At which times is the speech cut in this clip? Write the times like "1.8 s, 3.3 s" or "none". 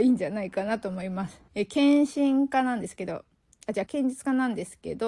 1.5 s, 3.9 s